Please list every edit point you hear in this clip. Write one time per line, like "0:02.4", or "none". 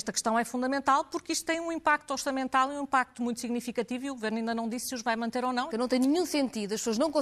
0:05.7